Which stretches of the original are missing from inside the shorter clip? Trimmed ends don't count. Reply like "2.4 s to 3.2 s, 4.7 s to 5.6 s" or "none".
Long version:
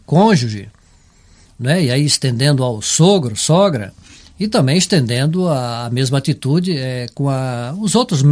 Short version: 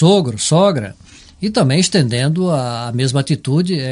none